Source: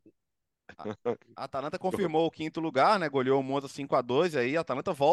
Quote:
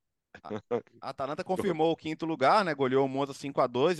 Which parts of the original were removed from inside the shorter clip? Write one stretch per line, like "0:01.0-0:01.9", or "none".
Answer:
none